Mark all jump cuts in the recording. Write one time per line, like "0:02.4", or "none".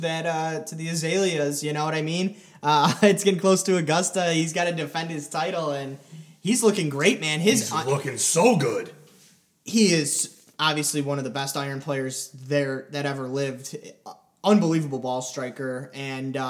none